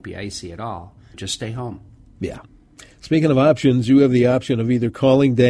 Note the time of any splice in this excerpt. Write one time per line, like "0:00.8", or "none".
0:01.1